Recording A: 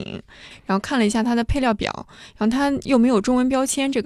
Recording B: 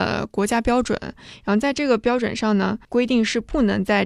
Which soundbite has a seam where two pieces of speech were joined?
B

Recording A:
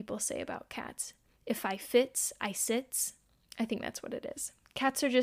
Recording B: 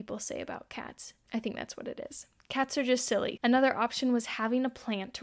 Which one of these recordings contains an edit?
B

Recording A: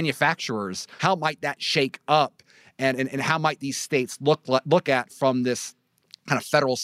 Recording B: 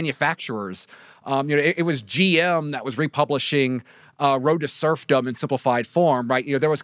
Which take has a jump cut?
A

